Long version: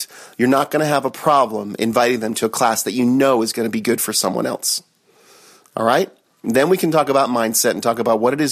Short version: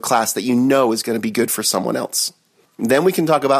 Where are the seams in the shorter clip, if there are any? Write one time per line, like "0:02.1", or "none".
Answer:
0:02.7

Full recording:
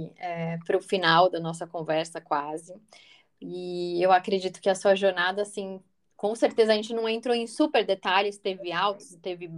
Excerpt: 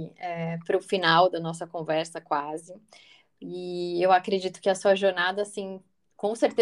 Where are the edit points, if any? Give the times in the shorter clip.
none

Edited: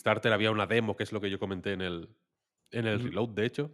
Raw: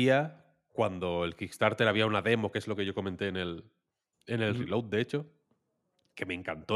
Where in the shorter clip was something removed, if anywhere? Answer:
none

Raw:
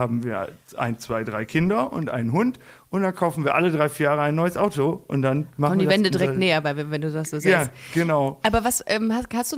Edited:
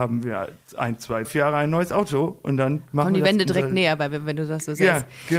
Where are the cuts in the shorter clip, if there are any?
0:01.2

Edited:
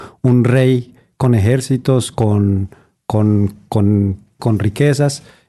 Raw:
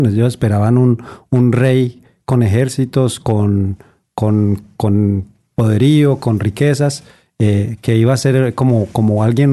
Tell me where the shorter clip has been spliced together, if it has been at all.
0:04.4

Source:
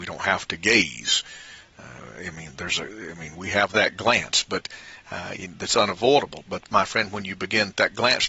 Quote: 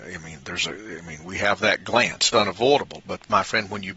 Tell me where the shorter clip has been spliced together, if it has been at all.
0:02.3

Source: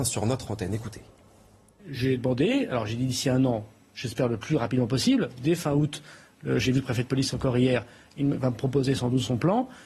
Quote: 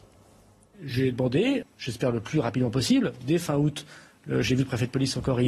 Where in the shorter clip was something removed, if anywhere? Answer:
0:01.6

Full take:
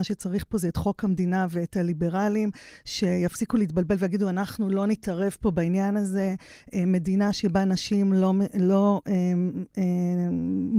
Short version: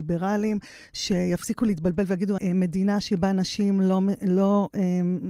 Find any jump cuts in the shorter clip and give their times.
0:02.4

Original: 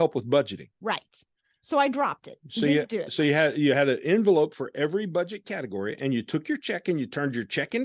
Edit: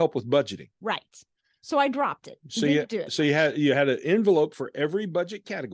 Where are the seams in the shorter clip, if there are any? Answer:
none

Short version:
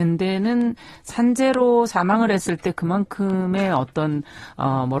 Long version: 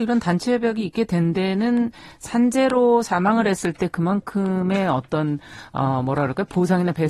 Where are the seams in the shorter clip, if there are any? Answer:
none

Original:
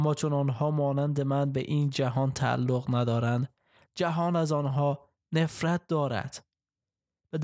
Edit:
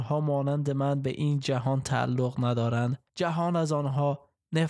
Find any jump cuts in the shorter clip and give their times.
0:03.1

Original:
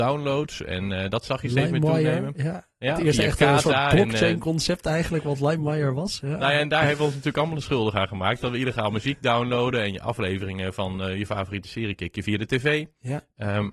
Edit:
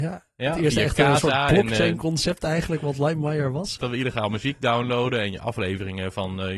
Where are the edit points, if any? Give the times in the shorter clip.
0:03.8

